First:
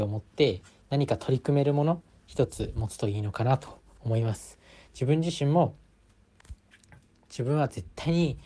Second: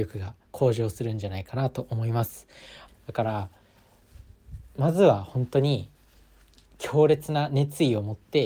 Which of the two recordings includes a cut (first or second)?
second